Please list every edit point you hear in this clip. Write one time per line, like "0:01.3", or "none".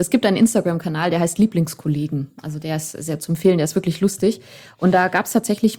none